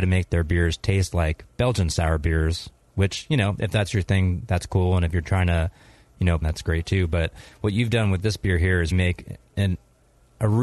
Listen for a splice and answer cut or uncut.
cut